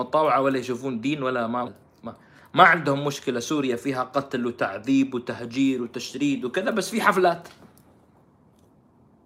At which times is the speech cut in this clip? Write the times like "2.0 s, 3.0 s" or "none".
1.7 s

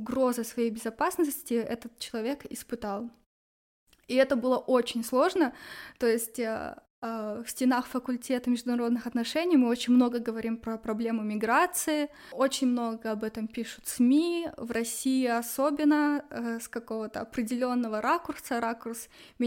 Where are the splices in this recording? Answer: none

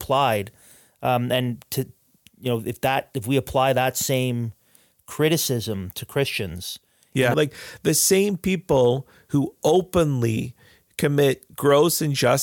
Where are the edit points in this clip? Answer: 7.3 s

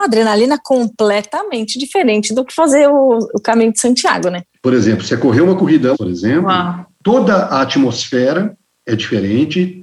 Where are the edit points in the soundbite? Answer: 5.9 s

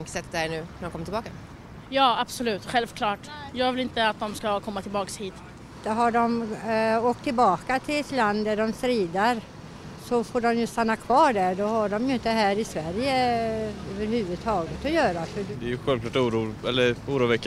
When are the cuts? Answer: none

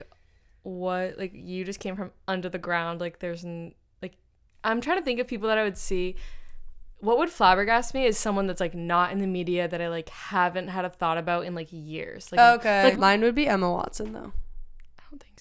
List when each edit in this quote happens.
12.9 s

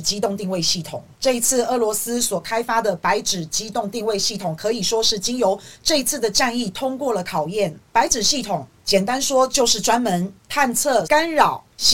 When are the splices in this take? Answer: 11.0 s

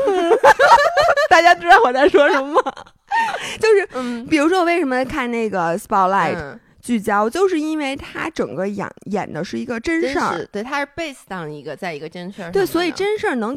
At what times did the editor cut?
none

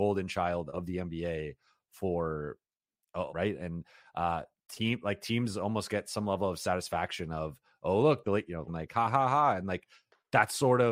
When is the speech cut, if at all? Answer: 3.3 s, 8.7 s

